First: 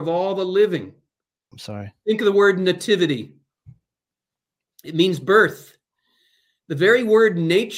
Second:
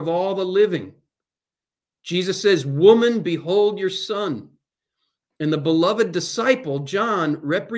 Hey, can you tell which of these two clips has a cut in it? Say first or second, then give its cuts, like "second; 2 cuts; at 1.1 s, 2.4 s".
first; 1 cut; at 1.5 s